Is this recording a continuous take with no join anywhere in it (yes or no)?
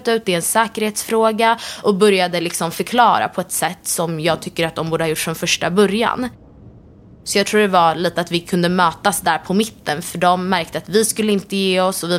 yes